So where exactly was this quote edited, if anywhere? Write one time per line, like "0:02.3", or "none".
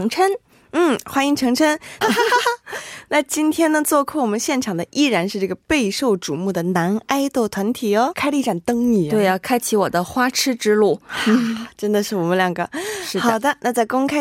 0:02.0
0:08.1